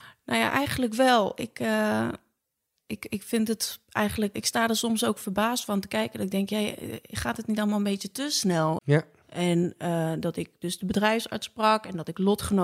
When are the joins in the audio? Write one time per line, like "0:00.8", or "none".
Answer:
0:04.3
0:08.8